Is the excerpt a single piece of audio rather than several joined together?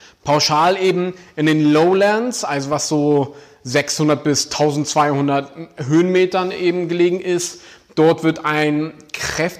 yes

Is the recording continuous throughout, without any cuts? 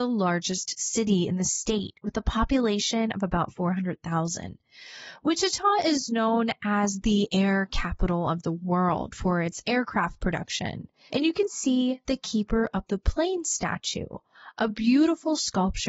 no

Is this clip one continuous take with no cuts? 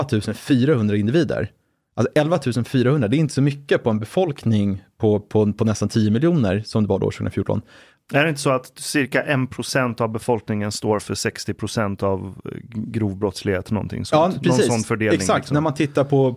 no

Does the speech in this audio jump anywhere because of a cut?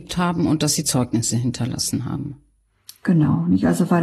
no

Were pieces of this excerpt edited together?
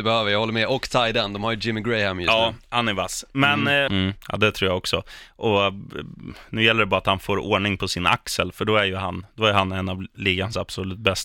yes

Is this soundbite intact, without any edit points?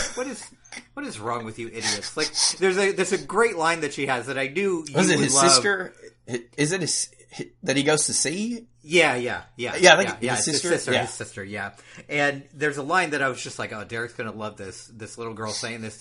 yes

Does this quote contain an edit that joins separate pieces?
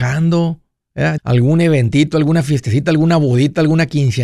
yes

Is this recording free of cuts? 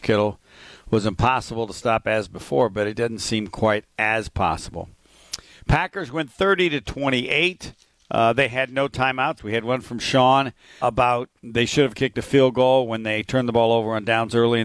no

